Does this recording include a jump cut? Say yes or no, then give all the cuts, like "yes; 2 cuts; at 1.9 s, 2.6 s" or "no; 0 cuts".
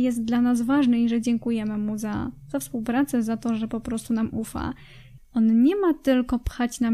yes; 1 cut; at 5.2 s